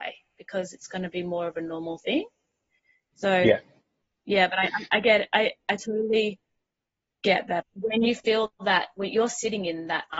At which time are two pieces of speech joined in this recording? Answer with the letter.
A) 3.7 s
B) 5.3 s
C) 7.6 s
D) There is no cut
C